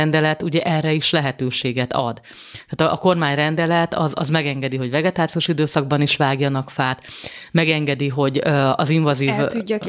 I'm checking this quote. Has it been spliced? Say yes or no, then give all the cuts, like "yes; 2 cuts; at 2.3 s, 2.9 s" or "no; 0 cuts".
no; 0 cuts